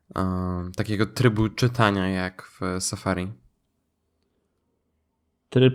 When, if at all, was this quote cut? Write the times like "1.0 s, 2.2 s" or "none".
none